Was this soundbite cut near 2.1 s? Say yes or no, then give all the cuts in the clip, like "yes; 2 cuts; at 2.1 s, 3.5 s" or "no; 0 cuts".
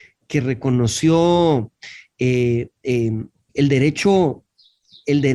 no; 1 cut; at 3.5 s